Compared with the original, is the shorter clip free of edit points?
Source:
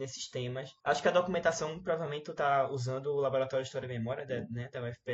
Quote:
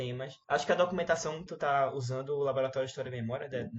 no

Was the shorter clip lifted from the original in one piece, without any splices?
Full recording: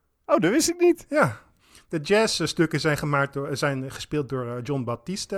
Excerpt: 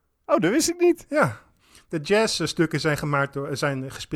yes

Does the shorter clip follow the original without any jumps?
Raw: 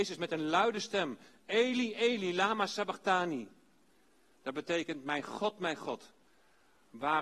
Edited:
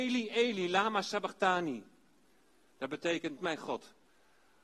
no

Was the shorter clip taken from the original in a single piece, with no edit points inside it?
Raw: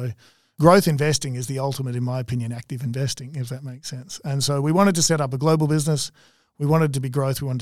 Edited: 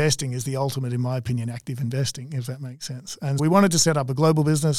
no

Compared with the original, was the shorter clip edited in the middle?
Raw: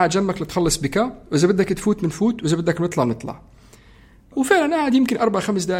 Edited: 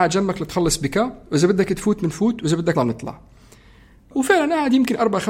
yes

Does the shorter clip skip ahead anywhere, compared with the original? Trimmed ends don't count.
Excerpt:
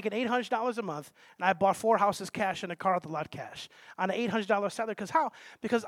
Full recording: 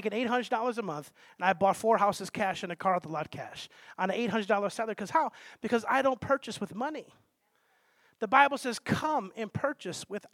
no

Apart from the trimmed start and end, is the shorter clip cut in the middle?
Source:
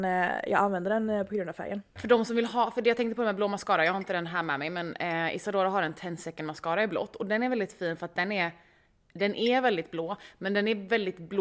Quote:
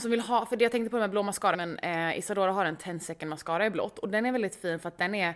yes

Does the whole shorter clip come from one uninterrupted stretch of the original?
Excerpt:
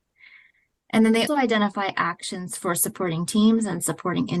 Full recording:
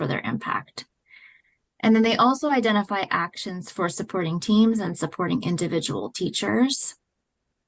no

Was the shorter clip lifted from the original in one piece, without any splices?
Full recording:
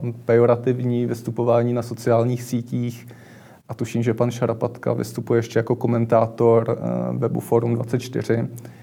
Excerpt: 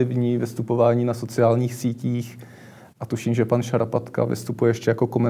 yes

